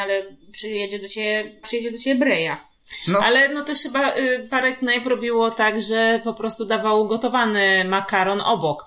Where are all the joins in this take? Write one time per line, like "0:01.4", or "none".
0:01.6